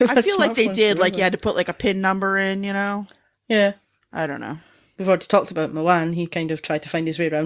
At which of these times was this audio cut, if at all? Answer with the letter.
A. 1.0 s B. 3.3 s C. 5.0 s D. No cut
C